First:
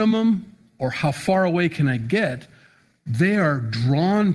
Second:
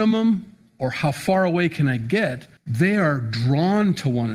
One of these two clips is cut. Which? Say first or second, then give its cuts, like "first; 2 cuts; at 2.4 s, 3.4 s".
second; 1 cut; at 2.6 s